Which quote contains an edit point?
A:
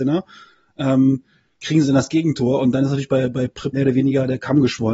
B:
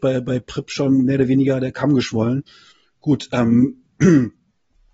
A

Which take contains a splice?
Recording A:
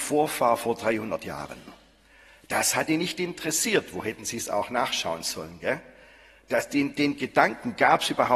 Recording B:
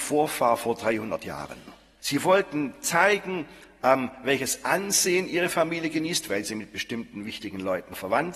B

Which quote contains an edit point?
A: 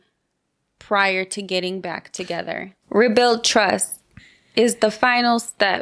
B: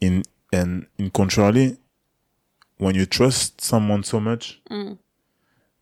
A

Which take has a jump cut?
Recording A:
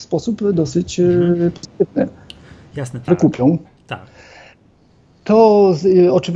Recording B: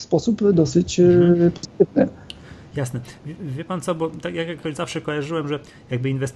A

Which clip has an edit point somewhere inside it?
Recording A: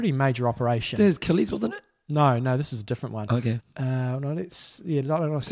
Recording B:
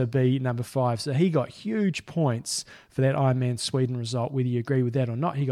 A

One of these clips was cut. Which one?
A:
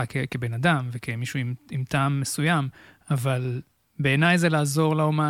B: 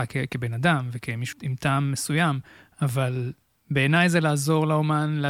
B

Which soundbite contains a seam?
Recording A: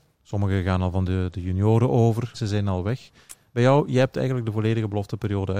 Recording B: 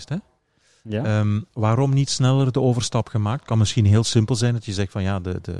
A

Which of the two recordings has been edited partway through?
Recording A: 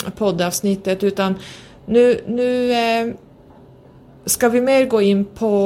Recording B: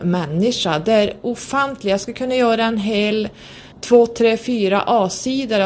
B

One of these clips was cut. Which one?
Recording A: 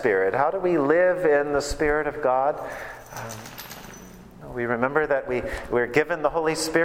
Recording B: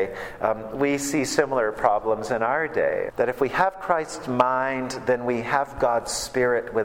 B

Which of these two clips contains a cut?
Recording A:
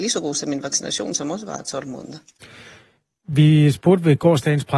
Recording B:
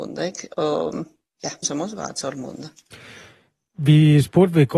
B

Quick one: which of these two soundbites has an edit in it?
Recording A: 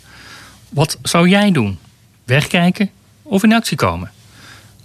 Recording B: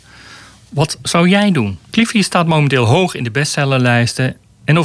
B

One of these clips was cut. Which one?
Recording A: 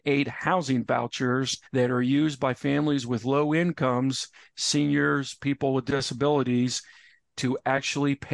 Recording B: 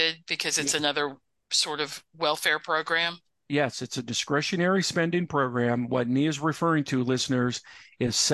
A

